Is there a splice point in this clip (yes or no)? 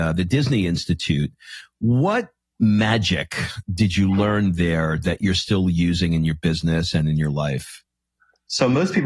no